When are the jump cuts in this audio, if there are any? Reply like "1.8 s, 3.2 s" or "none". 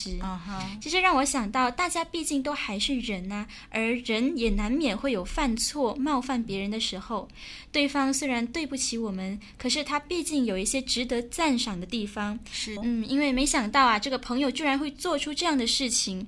12.8 s